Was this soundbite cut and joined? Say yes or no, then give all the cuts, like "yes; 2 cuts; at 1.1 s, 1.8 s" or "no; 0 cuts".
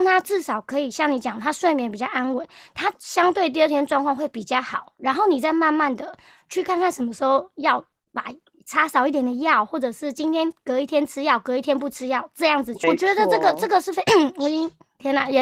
yes; 2 cuts; at 12.8 s, 14.1 s